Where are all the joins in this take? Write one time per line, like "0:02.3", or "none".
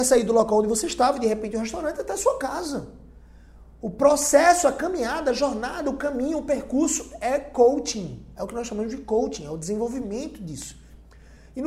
none